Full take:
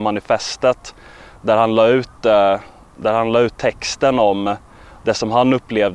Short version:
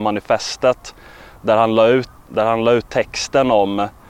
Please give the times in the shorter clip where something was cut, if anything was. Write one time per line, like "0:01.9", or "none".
0:02.2